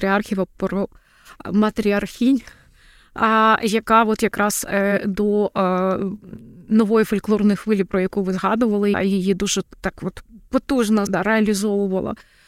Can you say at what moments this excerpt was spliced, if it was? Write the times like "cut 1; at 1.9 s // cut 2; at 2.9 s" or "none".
cut 1; at 8.9 s // cut 2; at 11.1 s